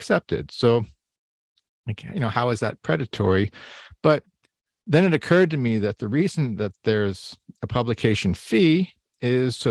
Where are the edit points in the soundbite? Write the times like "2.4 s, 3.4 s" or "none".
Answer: none